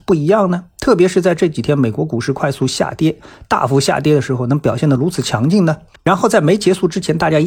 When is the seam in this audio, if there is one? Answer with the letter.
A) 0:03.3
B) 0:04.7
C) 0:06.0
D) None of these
C